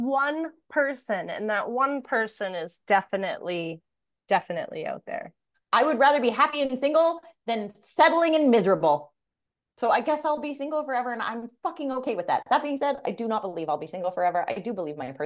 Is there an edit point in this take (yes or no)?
yes